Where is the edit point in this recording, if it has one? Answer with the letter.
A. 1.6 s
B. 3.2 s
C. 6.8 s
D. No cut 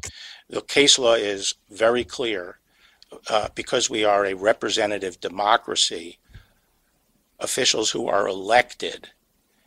D